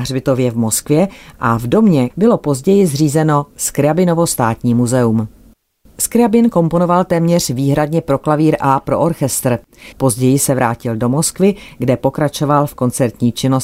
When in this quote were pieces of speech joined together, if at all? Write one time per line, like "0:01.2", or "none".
0:02.1
0:09.9

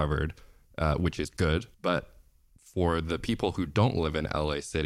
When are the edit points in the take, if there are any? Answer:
0:01.7

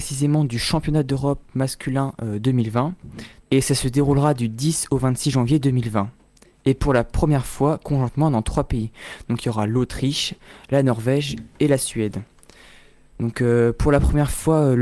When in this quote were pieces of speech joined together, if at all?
0:03.4

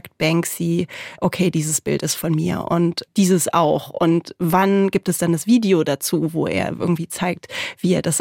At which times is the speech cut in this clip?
none

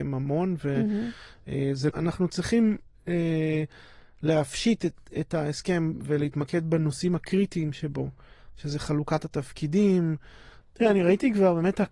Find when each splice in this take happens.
0:01.9
0:10.6

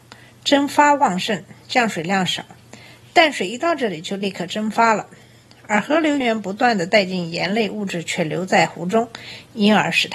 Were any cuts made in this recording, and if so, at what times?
0:06.2

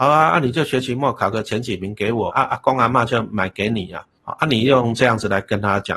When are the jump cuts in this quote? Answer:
0:02.3

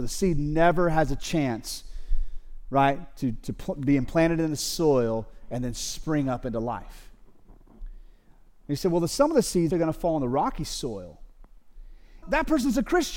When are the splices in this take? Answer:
0:09.7
0:12.2

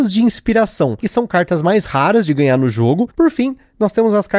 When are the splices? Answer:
0:03.1

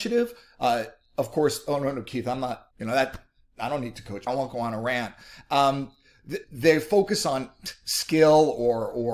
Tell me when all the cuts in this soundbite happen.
0:02.7
0:04.3
0:06.4

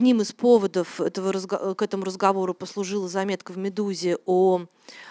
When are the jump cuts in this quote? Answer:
none

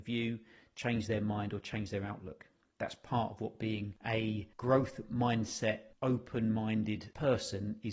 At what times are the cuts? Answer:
none

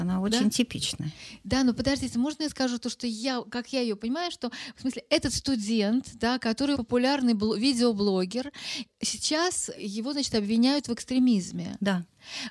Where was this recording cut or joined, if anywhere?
0:06.7

